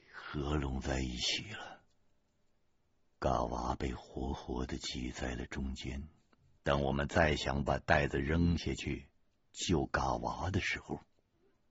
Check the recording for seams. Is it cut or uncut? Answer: cut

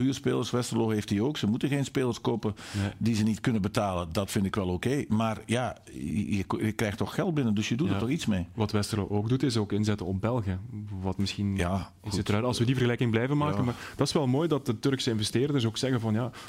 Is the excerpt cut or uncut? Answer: uncut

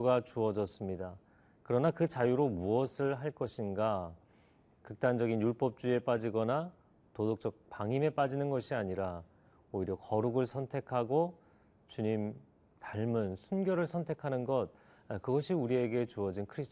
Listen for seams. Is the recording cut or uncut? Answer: uncut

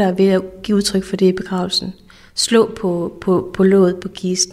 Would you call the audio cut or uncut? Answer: uncut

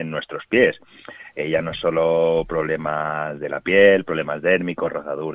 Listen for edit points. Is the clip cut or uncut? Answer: uncut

